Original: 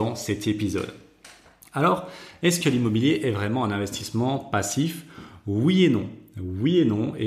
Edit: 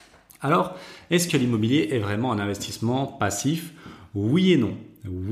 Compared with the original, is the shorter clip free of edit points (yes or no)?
yes